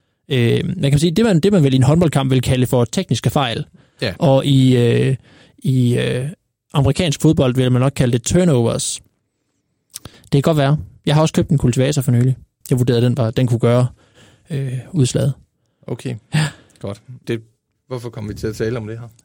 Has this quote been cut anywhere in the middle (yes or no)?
yes